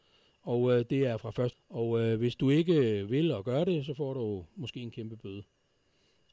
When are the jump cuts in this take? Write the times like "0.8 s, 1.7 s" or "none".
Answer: 1.5 s